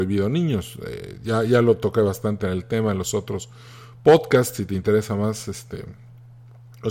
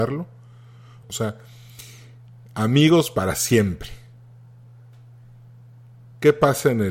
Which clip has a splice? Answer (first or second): second